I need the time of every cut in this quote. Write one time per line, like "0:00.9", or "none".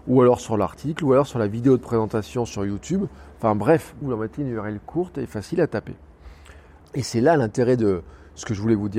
0:04.0
0:06.8

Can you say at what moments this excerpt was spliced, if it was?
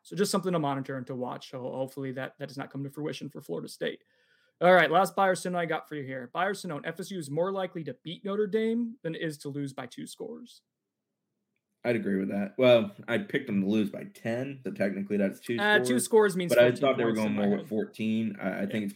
0:14.6

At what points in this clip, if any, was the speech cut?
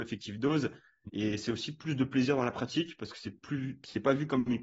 0:01.1

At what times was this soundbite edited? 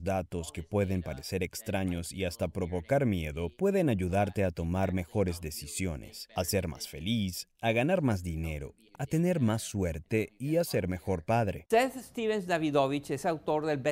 0:08.9
0:11.7

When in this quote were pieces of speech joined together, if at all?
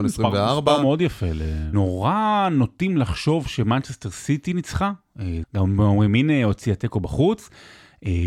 0:01.7
0:05.4

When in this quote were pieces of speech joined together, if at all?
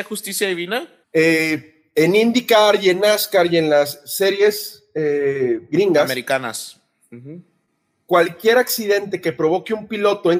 0:01.0

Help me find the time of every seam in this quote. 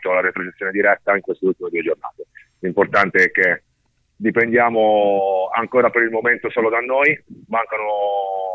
none

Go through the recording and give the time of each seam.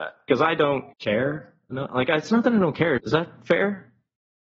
0:00.9
0:03.0

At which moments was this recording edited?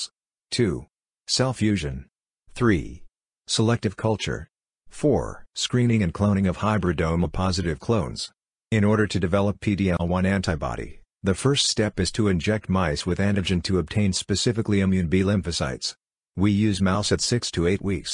0:05.5
0:08.6

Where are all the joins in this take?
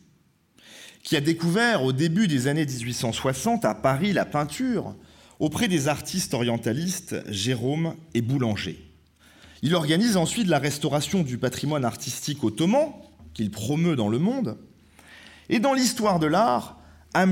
none

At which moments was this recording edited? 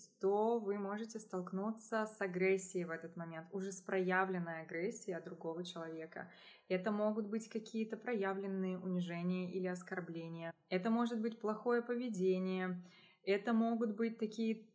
none

